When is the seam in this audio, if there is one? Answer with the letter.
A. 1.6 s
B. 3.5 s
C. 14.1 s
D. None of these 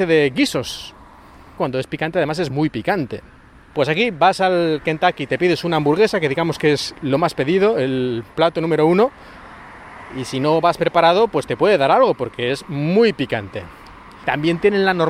A